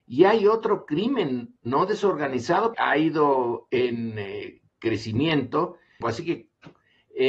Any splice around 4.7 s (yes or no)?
yes